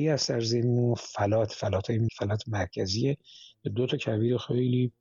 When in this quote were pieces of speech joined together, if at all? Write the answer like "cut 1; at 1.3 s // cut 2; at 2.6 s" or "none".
cut 1; at 2.1 s